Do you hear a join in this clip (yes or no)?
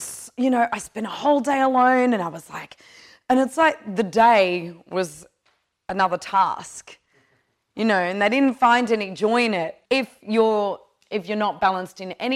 yes